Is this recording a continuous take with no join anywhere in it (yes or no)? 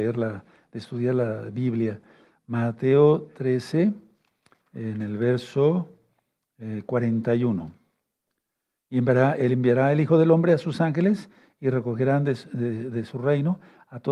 yes